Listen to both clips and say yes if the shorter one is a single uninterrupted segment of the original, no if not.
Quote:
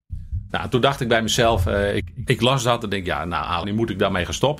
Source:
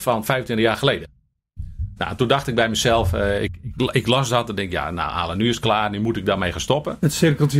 no